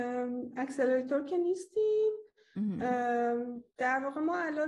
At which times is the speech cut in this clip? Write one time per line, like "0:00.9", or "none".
0:03.7